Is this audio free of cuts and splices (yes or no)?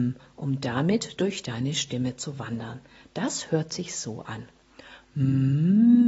yes